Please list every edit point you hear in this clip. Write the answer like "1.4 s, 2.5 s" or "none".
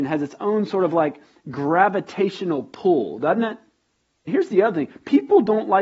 4.3 s